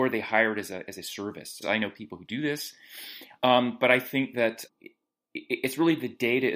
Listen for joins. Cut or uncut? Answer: cut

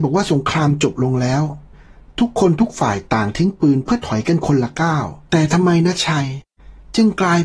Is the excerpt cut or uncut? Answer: cut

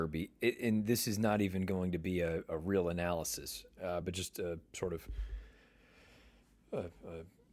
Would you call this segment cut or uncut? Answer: uncut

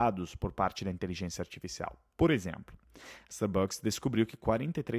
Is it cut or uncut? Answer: uncut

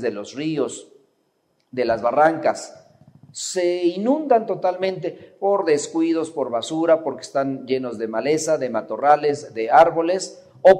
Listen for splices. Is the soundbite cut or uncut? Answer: uncut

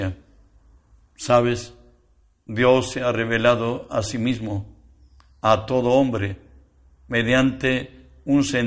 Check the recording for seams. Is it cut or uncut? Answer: uncut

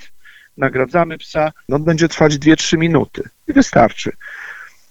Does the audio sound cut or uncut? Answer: cut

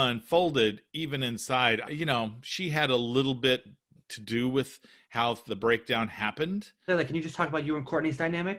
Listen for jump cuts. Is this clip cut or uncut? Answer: cut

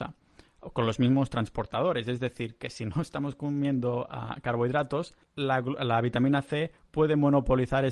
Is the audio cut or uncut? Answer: cut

